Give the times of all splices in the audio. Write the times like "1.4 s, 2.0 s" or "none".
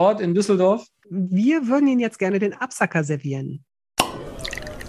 1.0 s